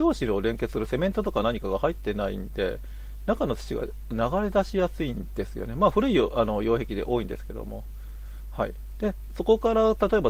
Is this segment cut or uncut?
uncut